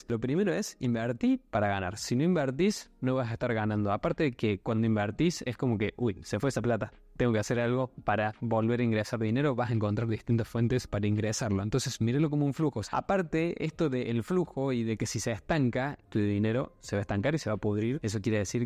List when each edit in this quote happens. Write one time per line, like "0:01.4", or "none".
0:12.8
0:16.0

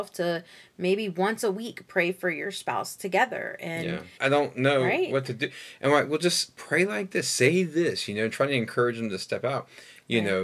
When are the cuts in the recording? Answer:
0:04.2

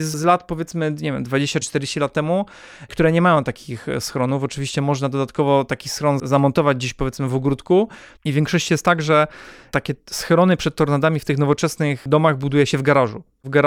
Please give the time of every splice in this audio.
0:01.6
0:08.2

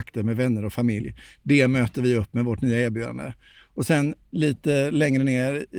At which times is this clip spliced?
none

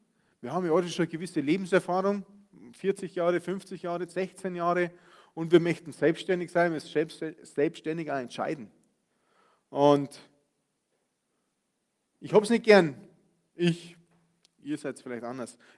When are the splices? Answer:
0:04.1

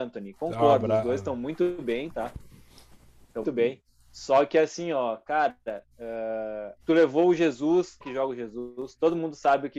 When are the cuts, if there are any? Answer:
0:03.4
0:06.8
0:08.0

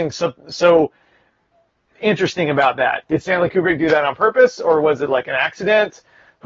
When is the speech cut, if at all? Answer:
0:03.0

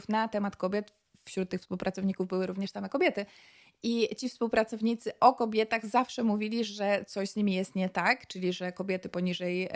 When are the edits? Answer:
none

